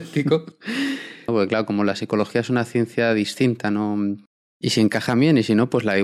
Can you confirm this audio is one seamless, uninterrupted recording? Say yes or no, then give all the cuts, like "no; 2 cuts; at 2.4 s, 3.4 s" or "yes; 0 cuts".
no; 2 cuts; at 1.3 s, 4.5 s